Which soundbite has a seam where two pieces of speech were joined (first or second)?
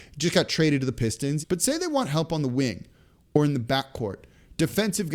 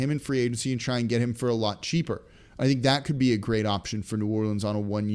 first